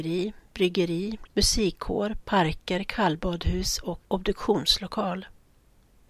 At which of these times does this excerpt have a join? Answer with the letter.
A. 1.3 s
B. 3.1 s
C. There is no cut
A